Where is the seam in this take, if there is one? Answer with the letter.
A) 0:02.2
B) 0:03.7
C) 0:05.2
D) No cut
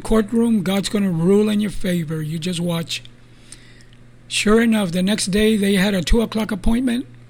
D